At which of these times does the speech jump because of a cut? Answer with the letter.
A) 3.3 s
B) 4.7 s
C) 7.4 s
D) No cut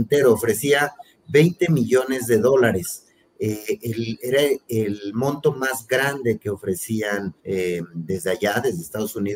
C